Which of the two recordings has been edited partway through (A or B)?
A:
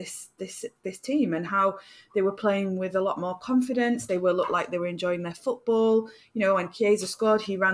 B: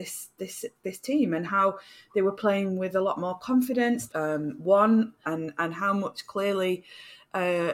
B